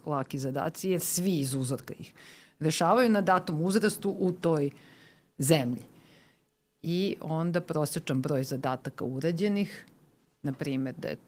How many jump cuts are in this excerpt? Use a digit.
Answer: 0